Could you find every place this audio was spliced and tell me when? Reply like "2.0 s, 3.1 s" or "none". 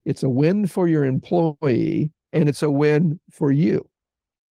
2.2 s